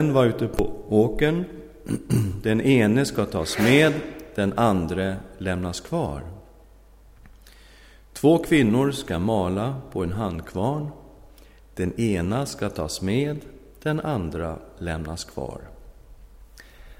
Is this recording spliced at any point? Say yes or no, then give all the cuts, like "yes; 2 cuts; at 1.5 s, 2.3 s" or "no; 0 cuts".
no; 0 cuts